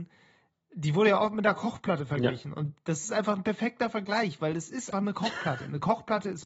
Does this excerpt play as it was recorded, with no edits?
no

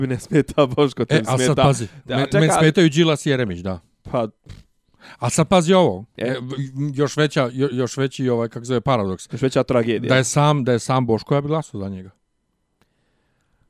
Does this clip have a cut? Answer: no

